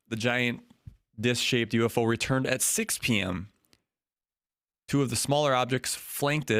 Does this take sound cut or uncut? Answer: uncut